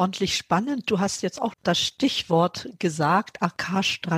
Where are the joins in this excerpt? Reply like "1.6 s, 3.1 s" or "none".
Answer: 1.5 s